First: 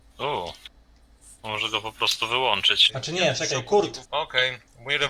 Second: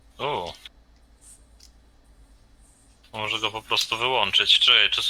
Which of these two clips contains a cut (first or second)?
first